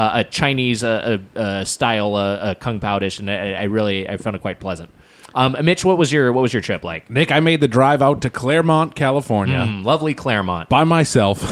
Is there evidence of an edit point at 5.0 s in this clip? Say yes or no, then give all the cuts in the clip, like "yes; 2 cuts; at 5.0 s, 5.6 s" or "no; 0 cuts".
no; 0 cuts